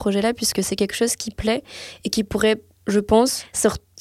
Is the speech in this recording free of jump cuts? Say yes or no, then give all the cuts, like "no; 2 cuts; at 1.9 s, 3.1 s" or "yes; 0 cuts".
yes; 0 cuts